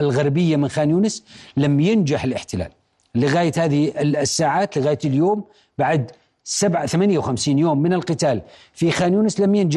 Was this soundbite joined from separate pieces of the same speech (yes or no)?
no